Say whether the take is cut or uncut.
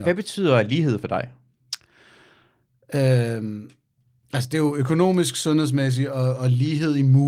uncut